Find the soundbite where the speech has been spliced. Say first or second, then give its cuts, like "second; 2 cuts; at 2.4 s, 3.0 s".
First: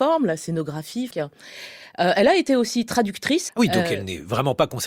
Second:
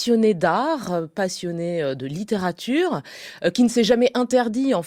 first; 2 cuts; at 1.1 s, 3.5 s